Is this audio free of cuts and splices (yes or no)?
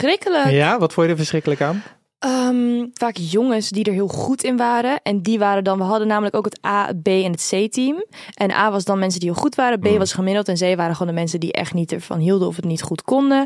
no